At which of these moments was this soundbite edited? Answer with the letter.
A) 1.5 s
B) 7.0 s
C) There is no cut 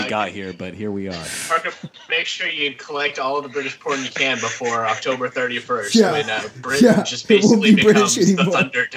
C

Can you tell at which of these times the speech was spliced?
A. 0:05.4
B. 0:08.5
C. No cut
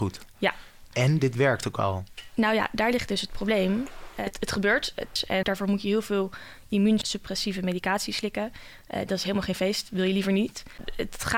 A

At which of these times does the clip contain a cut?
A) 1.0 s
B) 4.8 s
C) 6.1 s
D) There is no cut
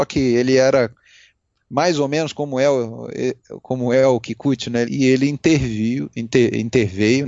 B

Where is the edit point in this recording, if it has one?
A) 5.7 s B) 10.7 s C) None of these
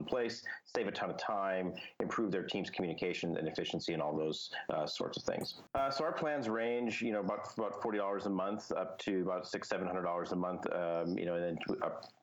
A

